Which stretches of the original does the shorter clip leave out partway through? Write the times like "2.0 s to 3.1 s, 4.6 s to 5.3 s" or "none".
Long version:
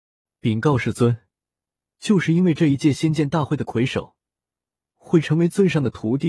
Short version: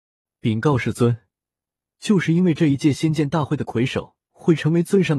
4.2 s to 4.9 s